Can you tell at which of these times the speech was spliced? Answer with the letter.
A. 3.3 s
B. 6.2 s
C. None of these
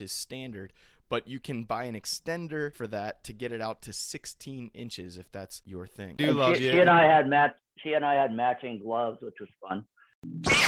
B